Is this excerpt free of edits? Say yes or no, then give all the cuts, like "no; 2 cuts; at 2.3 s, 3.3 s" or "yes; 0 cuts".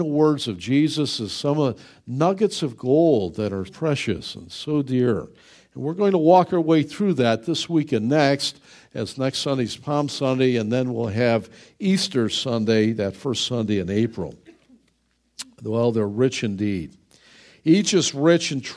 no; 1 cut; at 3.7 s